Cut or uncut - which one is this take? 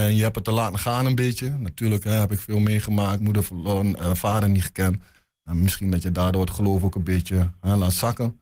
uncut